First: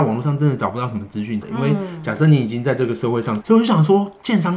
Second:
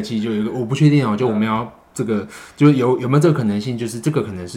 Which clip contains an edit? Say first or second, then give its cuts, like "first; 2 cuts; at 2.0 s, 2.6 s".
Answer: first; 2 cuts; at 1.4 s, 3.4 s